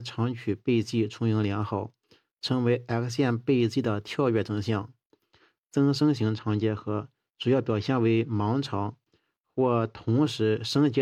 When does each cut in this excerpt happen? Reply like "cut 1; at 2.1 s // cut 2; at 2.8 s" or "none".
none